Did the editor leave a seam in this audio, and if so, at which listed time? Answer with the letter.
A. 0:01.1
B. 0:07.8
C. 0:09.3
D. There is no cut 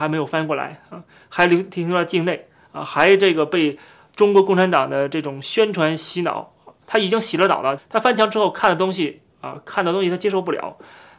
B